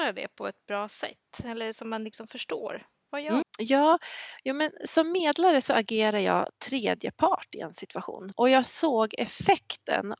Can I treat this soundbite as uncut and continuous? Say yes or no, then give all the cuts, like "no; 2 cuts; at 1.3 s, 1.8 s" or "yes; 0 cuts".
no; 2 cuts; at 3.4 s, 8.3 s